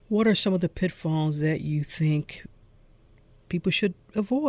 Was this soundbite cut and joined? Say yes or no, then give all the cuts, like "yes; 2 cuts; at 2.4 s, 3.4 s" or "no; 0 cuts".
no; 0 cuts